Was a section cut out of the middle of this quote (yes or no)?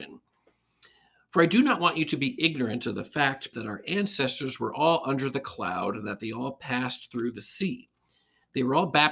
yes